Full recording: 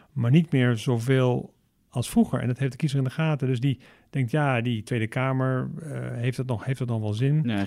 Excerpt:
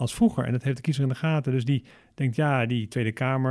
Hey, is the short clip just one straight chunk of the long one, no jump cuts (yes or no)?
yes